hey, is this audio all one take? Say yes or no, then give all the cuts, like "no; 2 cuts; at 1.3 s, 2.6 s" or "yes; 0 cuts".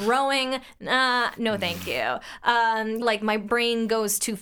no; 1 cut; at 3.0 s